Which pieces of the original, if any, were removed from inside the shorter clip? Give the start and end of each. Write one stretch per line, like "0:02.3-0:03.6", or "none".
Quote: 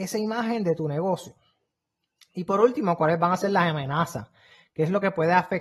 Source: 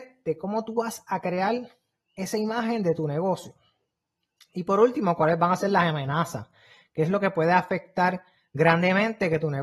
none